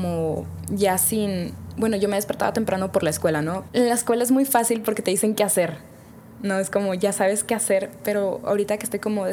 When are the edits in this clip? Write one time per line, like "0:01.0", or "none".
0:03.7